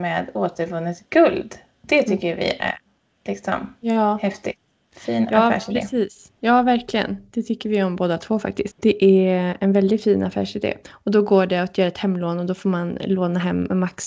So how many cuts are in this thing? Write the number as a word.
two